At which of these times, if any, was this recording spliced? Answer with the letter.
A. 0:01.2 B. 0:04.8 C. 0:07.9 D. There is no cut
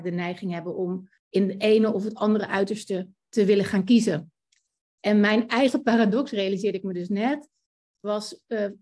A